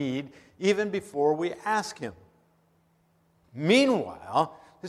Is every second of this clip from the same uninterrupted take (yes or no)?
no